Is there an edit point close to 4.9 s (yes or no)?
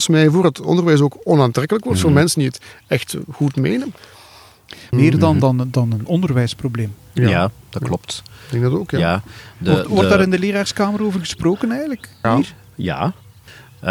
yes